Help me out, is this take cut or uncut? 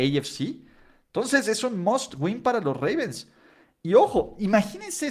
uncut